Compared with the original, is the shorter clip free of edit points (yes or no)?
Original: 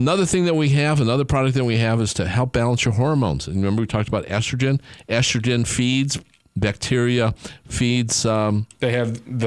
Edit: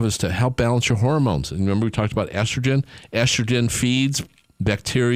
yes